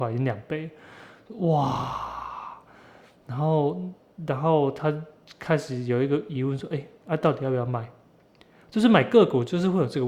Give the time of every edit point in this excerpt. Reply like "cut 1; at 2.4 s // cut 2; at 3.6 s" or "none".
cut 1; at 7.0 s